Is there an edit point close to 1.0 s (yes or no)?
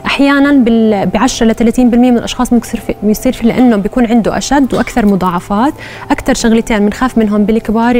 no